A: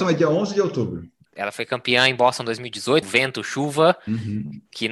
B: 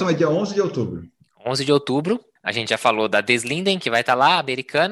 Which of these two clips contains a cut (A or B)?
A